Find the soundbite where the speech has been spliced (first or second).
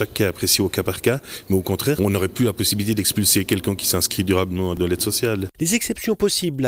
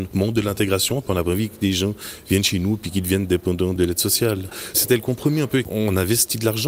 first